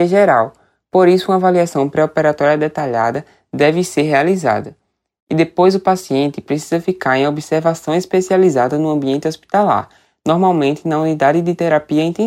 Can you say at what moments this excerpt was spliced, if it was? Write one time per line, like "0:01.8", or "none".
none